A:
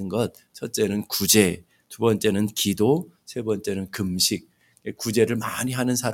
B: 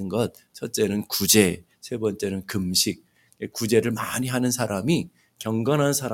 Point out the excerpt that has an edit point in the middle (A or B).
B